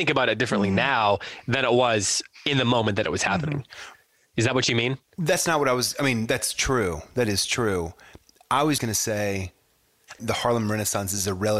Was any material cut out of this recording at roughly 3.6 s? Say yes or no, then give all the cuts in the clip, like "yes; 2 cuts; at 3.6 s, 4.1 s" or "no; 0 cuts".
no; 2 cuts; at 8.8 s, 10.2 s